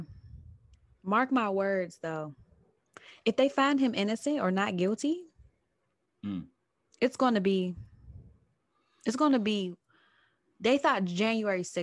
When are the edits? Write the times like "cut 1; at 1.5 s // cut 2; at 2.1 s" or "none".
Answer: none